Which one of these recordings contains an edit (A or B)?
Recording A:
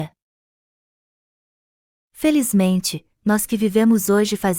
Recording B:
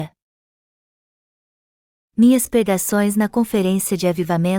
B